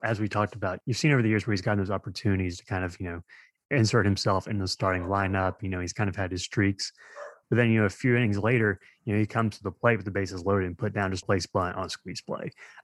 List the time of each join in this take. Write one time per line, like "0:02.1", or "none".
0:07.4
0:11.2